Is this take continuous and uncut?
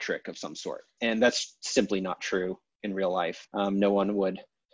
no; 2 cuts; at 1.0 s, 3.5 s

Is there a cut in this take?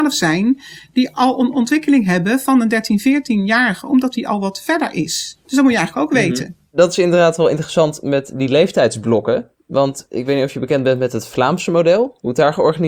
no; 0 cuts

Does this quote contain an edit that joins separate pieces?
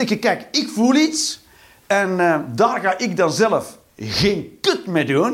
no; 0 cuts

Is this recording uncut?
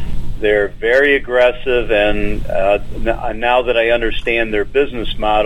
yes; 0 cuts

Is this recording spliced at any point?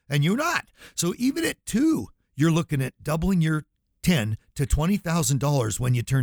no; 0 cuts

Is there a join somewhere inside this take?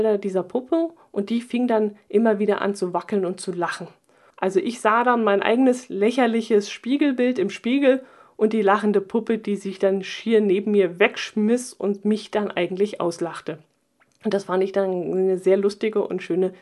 yes; 1 cut; at 4.3 s

